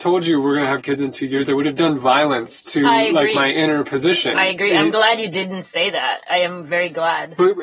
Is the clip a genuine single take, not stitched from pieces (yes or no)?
yes